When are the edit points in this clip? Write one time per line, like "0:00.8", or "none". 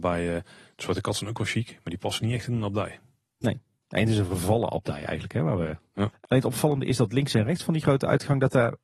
0:06.1